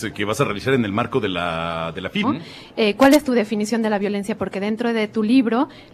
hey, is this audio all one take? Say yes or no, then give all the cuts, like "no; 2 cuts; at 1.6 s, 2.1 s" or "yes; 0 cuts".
no; 1 cut; at 2.2 s